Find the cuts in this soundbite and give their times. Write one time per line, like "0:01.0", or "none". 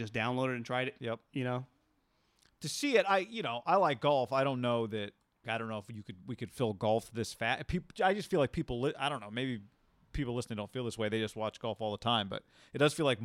0:01.0
0:05.4